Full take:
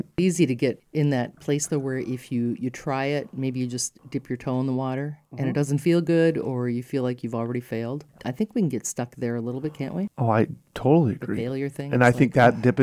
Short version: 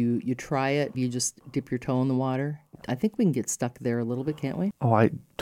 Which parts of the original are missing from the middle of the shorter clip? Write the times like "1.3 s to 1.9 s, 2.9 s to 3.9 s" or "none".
3.3 s to 3.5 s, 5.3 s to 8.1 s